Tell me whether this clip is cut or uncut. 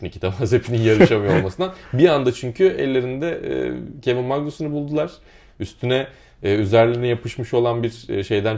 uncut